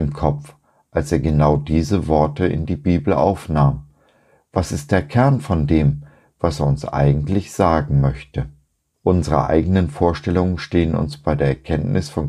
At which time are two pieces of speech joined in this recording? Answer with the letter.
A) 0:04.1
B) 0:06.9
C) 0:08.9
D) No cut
C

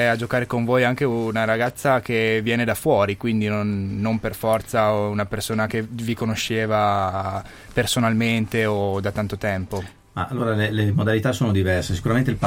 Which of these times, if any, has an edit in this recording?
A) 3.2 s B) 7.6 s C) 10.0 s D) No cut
D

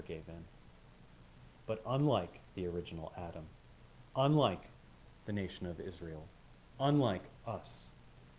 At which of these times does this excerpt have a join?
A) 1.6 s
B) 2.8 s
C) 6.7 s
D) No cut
A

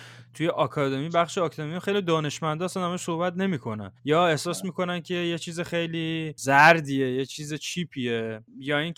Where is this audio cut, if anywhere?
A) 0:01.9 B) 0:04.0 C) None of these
B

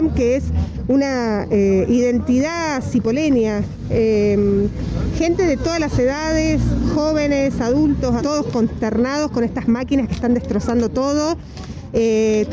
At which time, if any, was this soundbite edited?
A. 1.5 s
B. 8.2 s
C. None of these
B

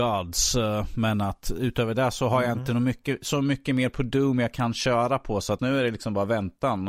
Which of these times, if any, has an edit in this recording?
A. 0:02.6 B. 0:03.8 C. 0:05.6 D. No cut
C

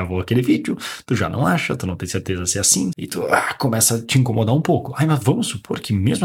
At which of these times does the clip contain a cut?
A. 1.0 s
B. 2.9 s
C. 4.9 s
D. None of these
B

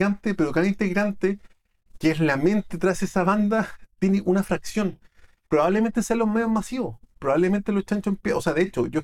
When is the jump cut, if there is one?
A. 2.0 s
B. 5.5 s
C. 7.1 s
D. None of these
B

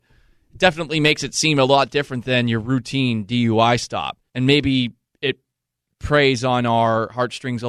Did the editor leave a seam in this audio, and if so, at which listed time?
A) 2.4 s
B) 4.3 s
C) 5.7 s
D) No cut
B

